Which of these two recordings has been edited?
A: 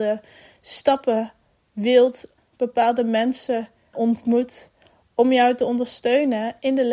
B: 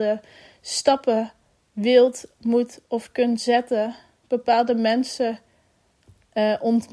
A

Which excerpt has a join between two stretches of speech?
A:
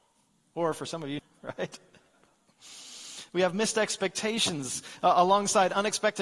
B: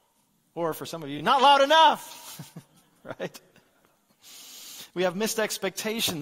A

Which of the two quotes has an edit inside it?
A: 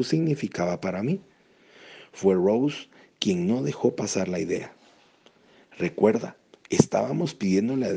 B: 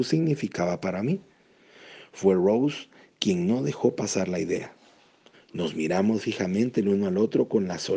B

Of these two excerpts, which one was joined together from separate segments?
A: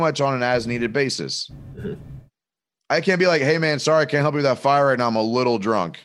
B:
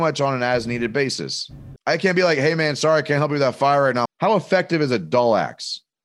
B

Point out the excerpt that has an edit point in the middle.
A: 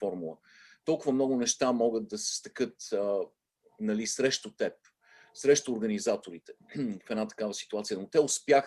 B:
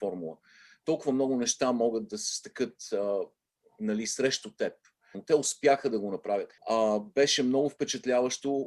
B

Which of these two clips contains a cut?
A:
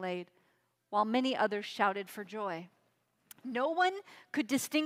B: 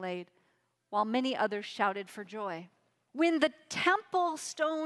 B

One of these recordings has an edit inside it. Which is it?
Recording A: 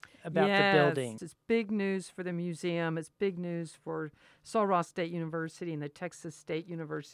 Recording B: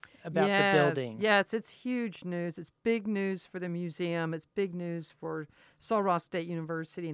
A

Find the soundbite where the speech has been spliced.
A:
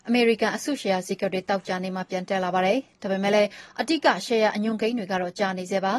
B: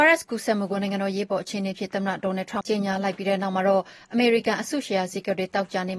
B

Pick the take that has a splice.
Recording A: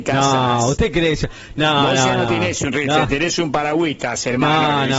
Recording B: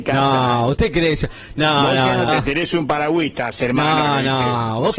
B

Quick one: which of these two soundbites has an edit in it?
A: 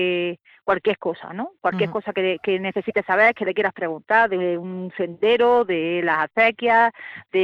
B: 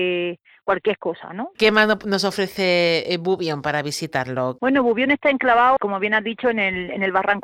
B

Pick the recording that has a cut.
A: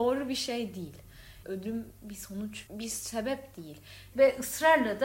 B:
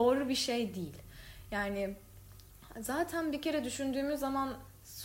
A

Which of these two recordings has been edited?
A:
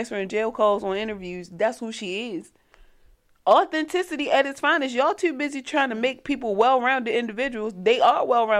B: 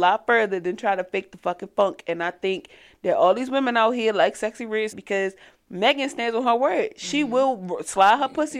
B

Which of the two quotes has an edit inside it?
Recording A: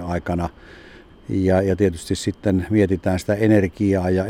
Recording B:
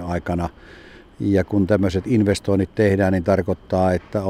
A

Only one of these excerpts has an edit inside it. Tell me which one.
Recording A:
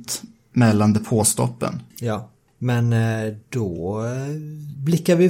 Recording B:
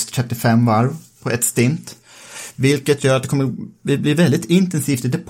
A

